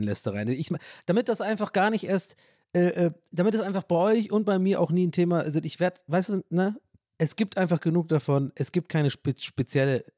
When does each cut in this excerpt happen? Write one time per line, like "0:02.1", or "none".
none